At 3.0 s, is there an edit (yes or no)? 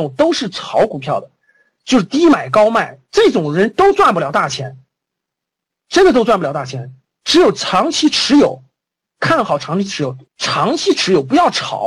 no